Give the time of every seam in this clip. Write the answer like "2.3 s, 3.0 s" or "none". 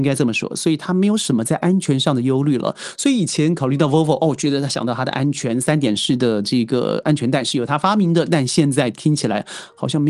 none